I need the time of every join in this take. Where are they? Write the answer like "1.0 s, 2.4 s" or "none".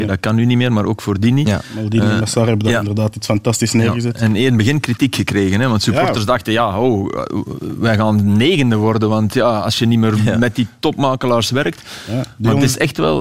none